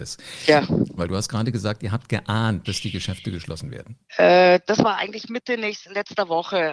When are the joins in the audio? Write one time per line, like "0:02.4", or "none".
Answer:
0:01.0
0:02.6
0:04.1